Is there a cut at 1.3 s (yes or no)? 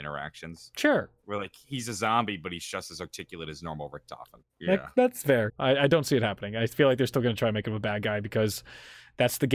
no